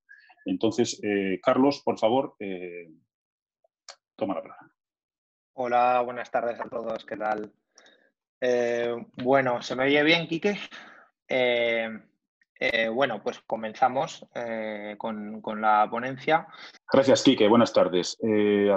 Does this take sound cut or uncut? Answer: cut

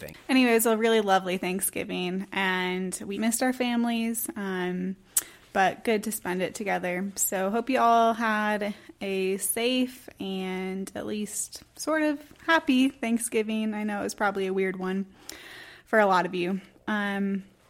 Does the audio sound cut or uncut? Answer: cut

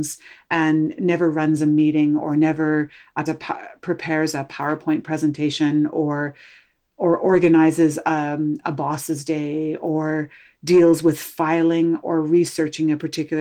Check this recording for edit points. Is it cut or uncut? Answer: cut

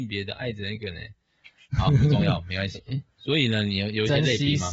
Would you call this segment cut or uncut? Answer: cut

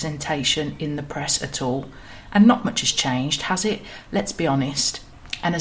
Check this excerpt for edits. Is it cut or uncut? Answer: uncut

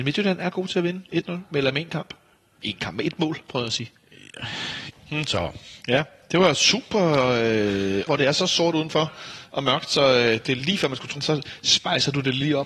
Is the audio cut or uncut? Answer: cut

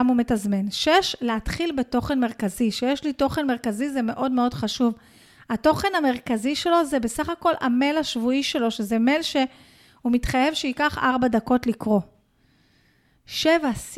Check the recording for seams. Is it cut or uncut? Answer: uncut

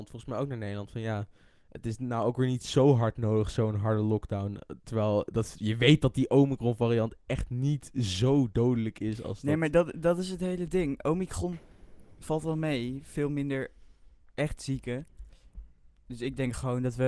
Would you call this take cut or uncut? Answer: uncut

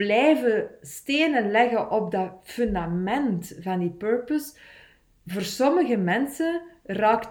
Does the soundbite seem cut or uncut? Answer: uncut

